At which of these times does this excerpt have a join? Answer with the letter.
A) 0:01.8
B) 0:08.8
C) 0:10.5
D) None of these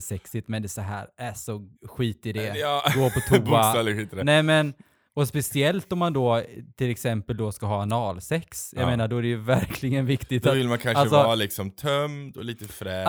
A